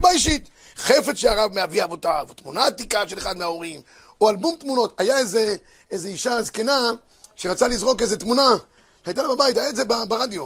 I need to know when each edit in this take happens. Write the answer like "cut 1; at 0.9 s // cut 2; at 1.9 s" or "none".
none